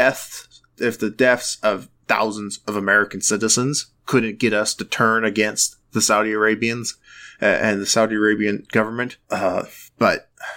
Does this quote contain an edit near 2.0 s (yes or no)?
no